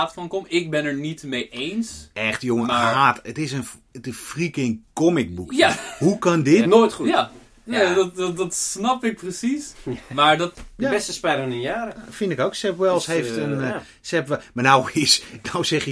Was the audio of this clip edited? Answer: yes; 2 cuts; at 6.6 s, 10.5 s

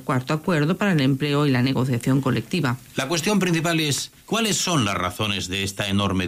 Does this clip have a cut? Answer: yes; 1 cut; at 4.2 s

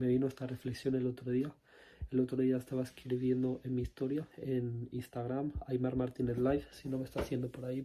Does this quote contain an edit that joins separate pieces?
no; 0 cuts

